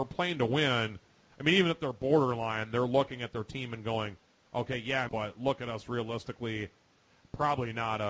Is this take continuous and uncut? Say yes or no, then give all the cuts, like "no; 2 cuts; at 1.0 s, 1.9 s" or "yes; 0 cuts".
no; 2 cuts; at 1.3 s, 5.1 s